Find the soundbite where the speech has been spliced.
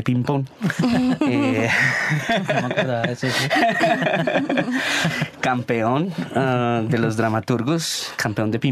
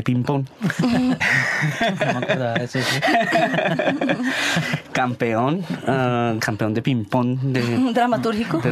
second; 2 cuts; at 1.2 s, 6.4 s

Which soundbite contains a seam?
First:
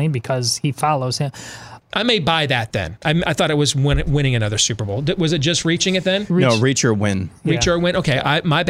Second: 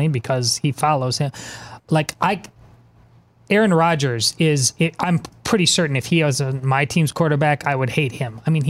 first; 1 cut; at 1.8 s

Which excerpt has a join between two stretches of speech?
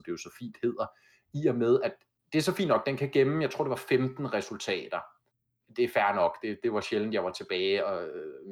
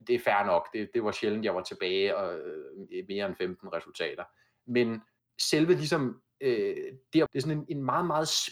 second; 1 cut; at 7.3 s

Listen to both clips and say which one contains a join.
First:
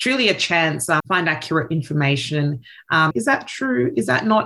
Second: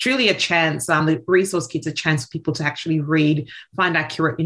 first; 2 cuts; at 1.0 s, 3.1 s

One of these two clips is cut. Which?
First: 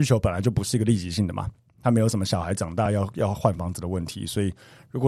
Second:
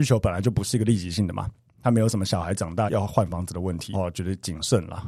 second; 2 cuts; at 2.9 s, 3.9 s

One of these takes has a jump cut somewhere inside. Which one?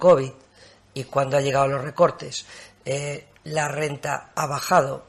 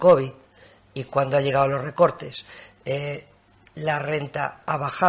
first; 1 cut; at 3.4 s

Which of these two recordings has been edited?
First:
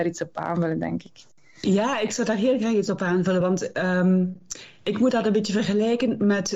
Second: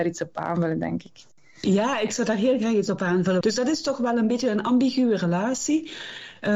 second; 1 cut; at 3.4 s

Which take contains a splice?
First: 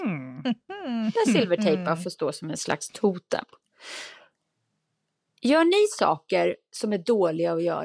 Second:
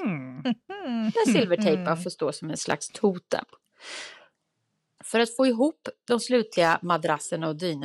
second; 1 cut; at 5.0 s

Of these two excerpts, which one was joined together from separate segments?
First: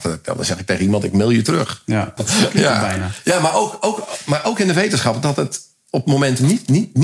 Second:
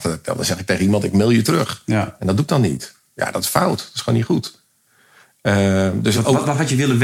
first; 1 cut; at 2.2 s

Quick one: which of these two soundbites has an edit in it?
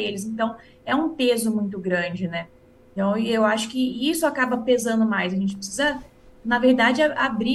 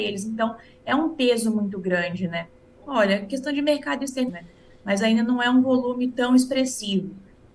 second; 2 cuts; at 2.8 s, 4.3 s

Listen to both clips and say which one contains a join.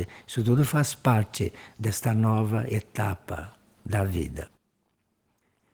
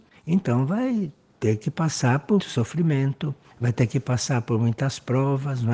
second; 1 cut; at 2.4 s

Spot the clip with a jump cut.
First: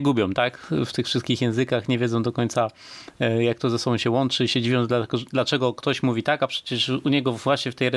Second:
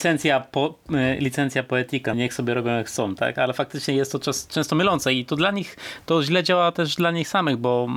second; 1 cut; at 2.1 s

